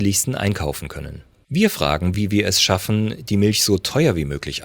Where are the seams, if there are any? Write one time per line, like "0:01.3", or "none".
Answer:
none